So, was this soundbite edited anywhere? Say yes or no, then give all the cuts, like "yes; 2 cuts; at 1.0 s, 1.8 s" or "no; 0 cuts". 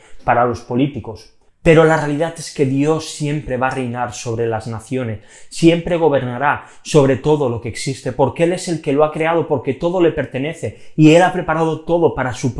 yes; 1 cut; at 1.5 s